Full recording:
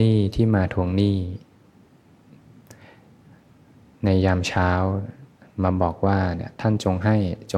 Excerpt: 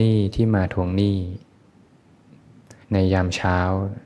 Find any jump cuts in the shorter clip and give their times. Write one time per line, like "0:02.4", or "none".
0:02.8